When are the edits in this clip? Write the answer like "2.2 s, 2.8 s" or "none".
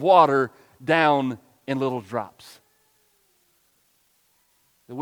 none